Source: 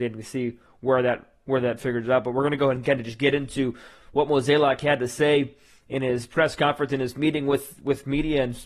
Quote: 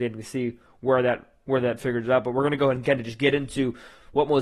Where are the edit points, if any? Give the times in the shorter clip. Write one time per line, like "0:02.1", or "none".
none